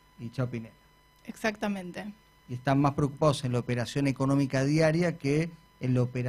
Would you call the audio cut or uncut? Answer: uncut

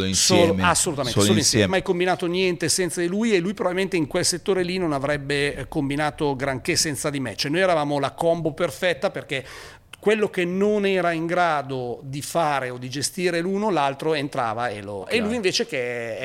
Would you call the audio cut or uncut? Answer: cut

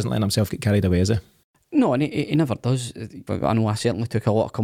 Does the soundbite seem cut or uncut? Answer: cut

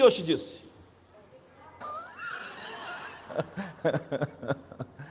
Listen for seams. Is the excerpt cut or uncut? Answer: cut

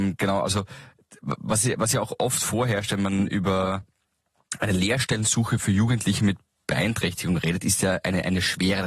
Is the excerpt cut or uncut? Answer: uncut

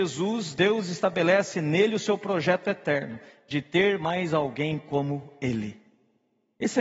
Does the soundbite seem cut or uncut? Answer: uncut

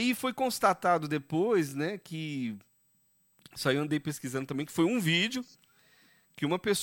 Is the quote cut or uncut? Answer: uncut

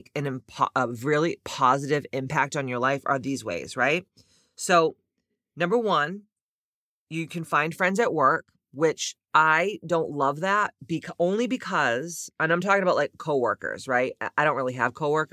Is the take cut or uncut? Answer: uncut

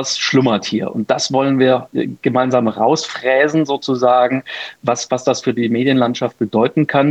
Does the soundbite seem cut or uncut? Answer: uncut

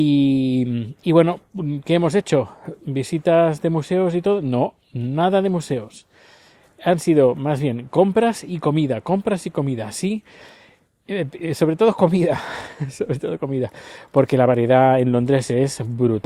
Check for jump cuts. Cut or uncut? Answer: uncut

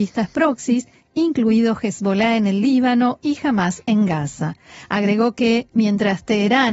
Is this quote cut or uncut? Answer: uncut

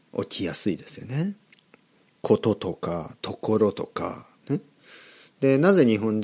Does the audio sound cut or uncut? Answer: uncut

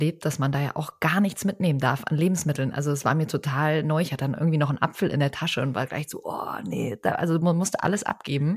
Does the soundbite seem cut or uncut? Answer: uncut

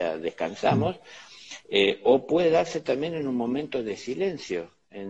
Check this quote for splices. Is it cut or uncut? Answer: uncut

